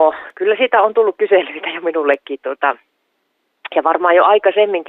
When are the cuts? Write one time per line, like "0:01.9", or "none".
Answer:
none